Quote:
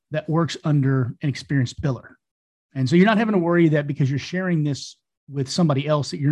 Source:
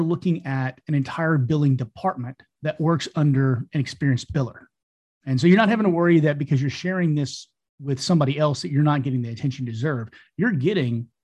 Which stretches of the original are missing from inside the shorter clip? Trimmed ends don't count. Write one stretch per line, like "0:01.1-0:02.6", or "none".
none